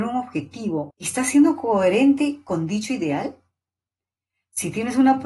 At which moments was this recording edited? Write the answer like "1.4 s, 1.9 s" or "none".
0.9 s